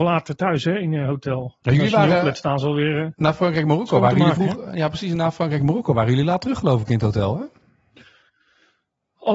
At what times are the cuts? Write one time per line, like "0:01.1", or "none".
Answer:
none